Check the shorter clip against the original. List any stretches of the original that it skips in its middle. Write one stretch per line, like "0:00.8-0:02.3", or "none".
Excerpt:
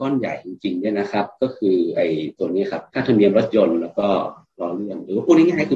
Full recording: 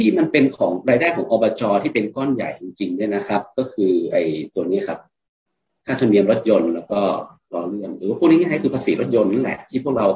0:05.0-0:05.8